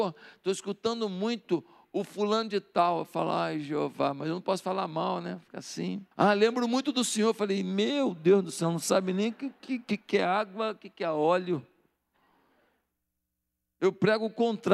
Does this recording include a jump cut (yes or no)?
yes